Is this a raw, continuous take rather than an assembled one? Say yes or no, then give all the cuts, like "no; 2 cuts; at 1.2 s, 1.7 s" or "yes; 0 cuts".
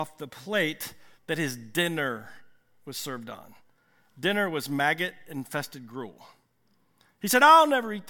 no; 1 cut; at 1.1 s